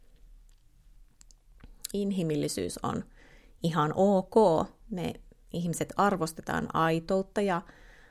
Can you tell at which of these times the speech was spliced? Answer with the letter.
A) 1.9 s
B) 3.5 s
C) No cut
A